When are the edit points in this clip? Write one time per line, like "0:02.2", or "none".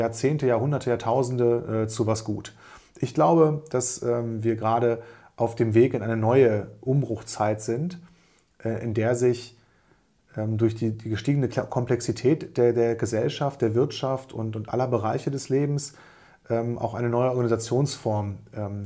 none